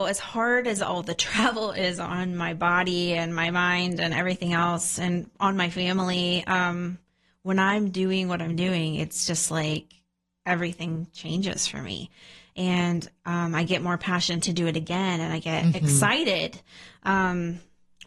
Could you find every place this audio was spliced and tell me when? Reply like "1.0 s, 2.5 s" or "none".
none